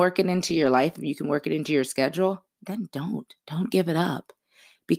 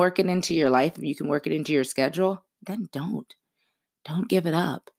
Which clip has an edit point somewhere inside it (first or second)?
first